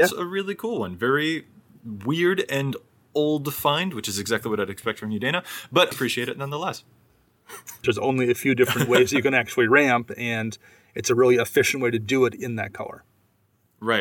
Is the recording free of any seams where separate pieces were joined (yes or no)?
no